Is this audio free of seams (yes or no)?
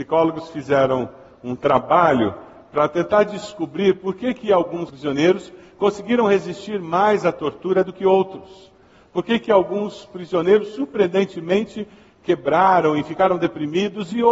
yes